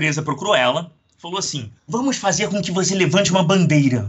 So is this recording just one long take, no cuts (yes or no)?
no